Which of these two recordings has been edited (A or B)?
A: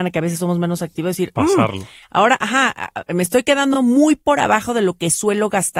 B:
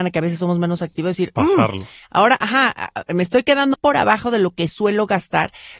B